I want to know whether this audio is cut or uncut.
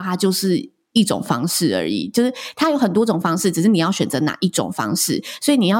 uncut